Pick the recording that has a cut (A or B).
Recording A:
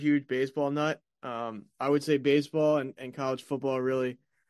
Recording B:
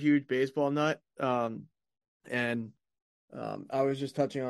B